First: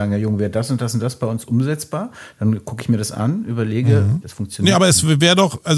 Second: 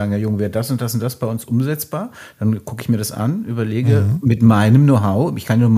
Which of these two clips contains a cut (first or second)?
first